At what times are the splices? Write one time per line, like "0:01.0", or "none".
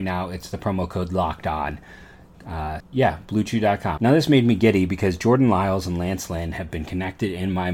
0:02.8
0:04.0